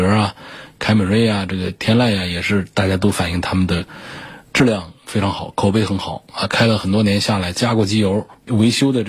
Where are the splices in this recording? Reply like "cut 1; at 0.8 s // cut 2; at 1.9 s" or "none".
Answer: cut 1; at 7.5 s